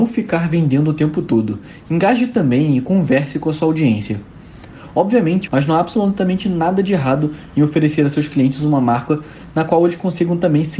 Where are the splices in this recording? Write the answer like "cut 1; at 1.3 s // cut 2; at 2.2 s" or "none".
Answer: cut 1; at 5.5 s